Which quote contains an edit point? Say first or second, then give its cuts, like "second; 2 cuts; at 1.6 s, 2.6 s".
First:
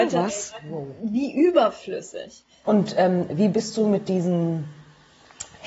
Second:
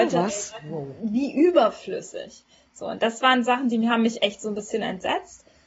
first; 1 cut; at 2.6 s